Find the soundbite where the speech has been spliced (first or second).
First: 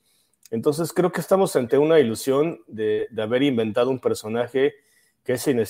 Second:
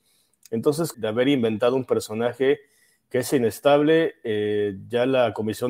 second